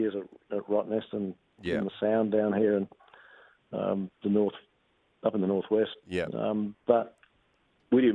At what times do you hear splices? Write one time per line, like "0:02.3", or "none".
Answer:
none